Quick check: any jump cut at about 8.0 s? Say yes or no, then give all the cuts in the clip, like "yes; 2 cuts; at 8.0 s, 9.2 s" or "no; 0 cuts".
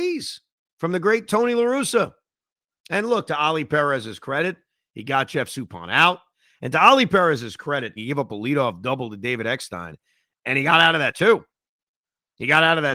yes; 1 cut; at 8.0 s